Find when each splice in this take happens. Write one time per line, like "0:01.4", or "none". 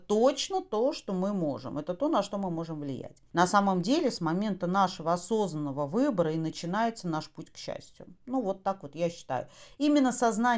0:03.3